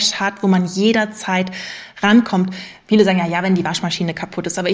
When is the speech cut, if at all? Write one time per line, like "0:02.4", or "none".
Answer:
none